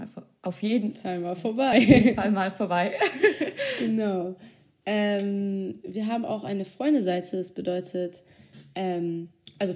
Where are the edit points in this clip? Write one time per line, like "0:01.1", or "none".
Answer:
none